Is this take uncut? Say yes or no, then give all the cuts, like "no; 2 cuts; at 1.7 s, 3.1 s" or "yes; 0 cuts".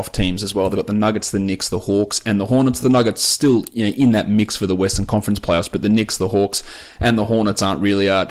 yes; 0 cuts